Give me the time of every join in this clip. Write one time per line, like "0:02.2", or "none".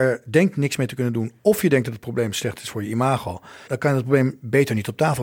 0:03.7